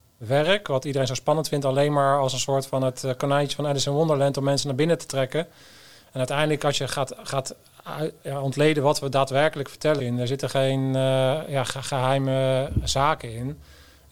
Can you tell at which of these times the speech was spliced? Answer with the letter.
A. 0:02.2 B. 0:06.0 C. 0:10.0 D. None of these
C